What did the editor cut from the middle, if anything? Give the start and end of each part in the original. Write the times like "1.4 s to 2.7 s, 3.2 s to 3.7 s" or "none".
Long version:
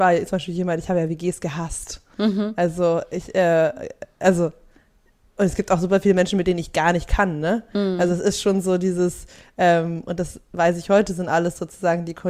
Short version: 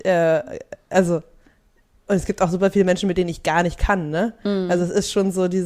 none

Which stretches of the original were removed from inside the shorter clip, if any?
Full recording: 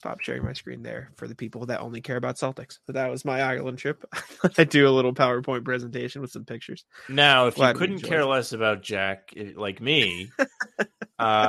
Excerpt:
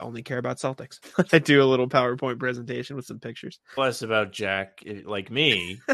2.8 s to 4.3 s, 7.0 s to 8.3 s

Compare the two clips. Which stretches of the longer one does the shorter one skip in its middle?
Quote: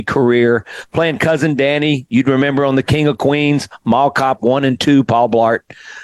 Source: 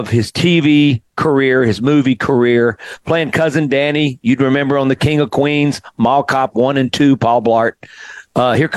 none

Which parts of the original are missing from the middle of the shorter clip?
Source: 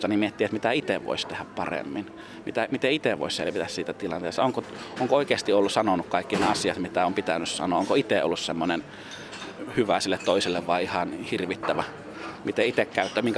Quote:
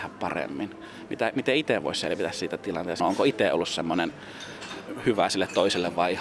4.4 s to 7.7 s

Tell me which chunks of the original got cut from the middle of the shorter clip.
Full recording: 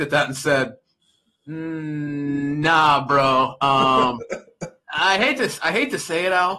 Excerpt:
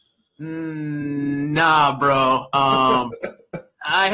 none

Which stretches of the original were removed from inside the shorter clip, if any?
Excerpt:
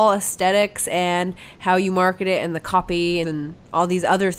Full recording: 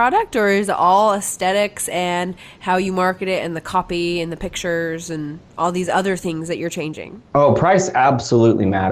4.2 s to 5.1 s

